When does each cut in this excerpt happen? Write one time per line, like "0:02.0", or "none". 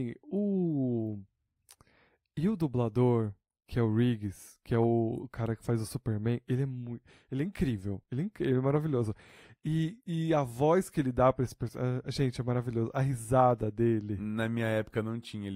none